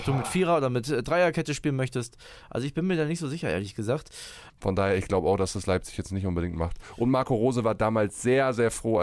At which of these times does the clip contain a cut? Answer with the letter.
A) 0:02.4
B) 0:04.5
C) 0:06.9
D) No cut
B